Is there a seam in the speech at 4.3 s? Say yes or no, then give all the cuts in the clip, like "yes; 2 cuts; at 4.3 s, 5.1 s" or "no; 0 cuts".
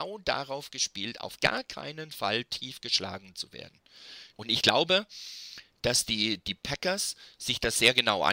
yes; 1 cut; at 4.3 s